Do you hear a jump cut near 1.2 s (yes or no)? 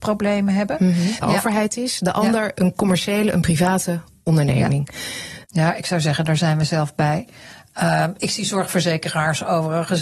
yes